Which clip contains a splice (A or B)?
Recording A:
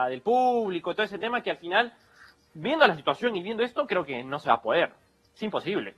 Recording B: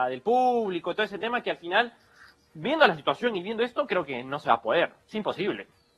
B